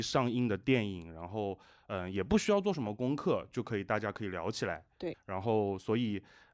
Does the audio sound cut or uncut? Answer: cut